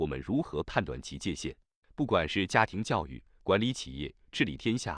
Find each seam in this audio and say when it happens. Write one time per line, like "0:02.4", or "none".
0:01.8

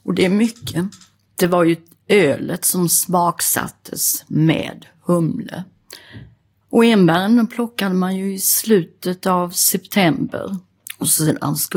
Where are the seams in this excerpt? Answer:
0:06.6

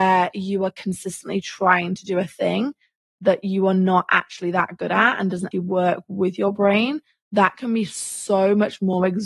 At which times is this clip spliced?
0:05.5

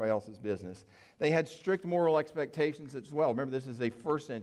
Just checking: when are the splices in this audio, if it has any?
none

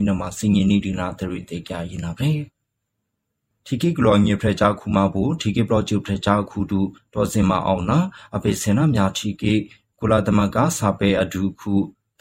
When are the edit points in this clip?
none

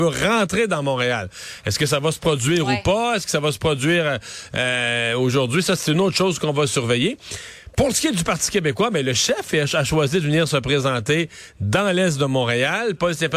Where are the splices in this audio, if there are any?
none

